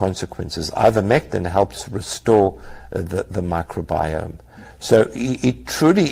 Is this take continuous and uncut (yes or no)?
yes